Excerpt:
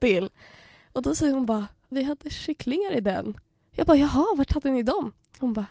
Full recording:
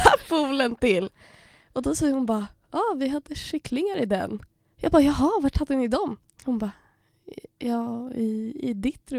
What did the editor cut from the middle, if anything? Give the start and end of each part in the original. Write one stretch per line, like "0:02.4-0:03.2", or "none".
0:02.7-0:03.0